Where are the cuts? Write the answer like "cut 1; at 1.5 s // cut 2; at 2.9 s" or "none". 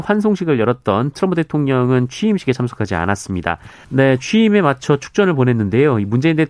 cut 1; at 3.8 s